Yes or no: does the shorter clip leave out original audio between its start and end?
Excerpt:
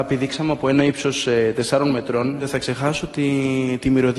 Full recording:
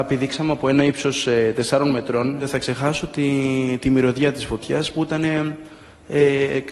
no